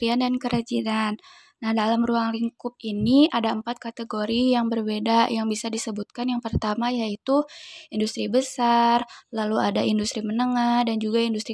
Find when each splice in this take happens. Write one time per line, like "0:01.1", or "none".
none